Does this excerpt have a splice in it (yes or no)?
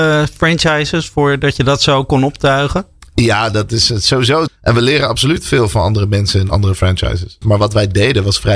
yes